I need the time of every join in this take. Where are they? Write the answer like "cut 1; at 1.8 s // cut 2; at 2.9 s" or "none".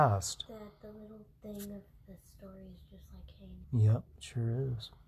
cut 1; at 3.6 s